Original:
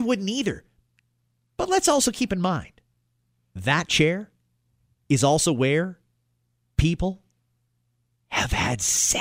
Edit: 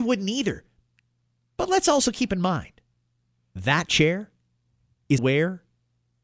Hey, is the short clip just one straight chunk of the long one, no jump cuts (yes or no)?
no